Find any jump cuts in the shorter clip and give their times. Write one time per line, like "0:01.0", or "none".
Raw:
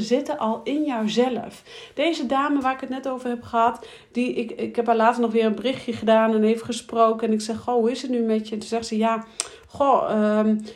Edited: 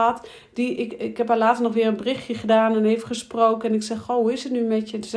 none

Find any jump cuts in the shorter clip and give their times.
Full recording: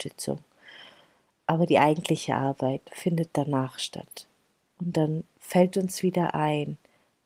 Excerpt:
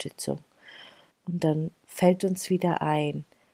0:01.1

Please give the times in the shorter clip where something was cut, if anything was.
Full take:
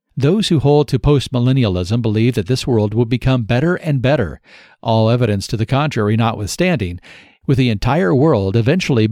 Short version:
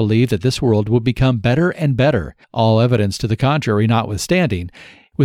0:02.4

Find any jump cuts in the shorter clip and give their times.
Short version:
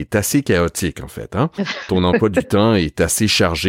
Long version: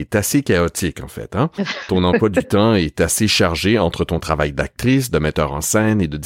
none

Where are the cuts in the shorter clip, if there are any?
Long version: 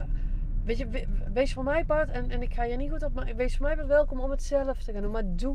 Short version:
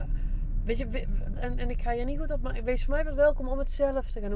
0:01.3

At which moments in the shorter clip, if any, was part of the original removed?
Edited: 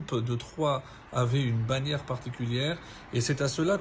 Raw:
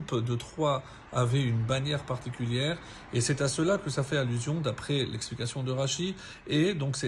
none

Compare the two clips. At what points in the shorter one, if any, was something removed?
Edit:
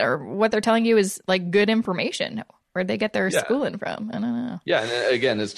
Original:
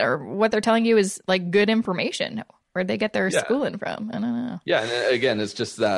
none

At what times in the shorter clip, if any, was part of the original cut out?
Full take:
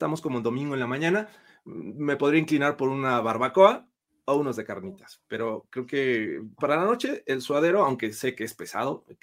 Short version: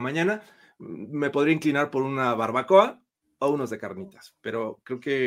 none

